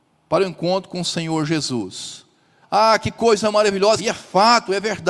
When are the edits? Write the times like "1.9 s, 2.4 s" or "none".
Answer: 2.6 s, 4.0 s